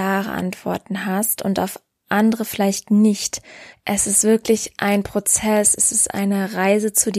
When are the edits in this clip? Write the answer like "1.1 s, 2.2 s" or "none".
3.7 s